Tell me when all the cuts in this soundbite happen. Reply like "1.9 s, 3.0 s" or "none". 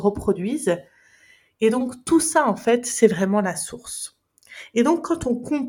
none